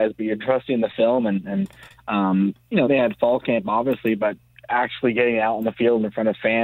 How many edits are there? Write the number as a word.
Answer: one